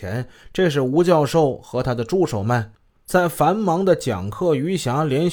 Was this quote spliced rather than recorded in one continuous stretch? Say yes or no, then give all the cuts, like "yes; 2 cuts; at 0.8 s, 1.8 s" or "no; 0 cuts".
no; 0 cuts